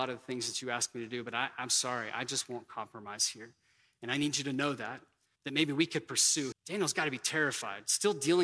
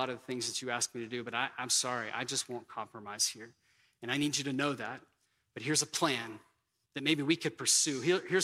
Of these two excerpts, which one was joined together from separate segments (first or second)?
first